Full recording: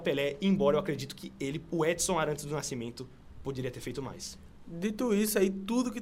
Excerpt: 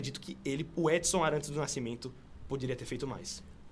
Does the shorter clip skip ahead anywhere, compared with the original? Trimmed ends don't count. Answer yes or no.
no